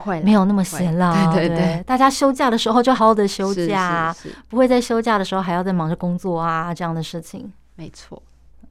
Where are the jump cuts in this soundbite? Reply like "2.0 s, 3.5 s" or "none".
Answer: 3.0 s